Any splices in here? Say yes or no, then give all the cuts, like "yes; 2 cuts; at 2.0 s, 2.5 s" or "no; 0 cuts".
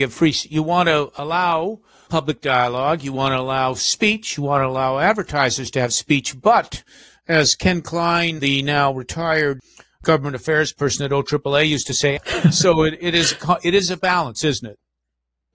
yes; 1 cut; at 12.2 s